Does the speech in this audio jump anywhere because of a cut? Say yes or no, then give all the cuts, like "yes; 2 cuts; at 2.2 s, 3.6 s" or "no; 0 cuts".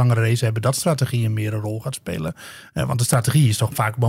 no; 0 cuts